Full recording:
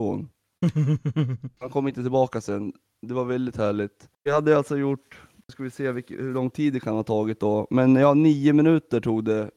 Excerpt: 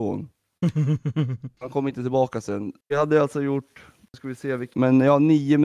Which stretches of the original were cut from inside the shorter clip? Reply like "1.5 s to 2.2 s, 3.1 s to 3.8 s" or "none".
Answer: 2.8 s to 4.2 s, 6.1 s to 7.7 s